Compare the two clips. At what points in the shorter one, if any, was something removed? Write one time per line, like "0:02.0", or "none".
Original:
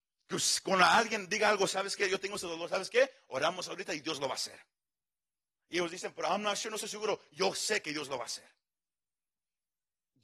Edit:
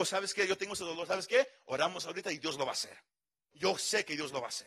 0:03.5